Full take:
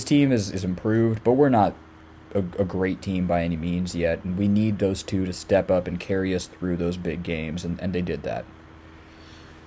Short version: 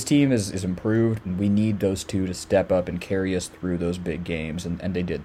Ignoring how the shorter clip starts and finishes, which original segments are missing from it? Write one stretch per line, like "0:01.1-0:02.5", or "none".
0:01.2-0:04.2